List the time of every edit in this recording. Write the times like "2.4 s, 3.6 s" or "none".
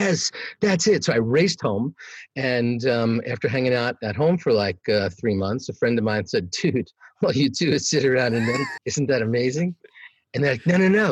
8.8 s